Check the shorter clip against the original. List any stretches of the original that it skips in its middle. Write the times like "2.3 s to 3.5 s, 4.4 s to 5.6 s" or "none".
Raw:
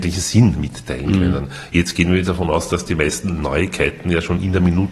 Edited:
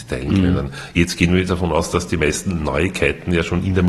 none